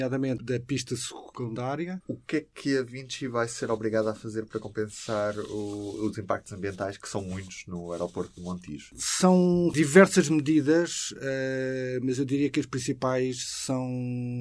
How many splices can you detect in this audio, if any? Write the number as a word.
one